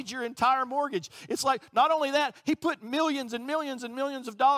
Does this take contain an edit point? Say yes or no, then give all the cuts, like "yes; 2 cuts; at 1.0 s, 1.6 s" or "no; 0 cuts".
no; 0 cuts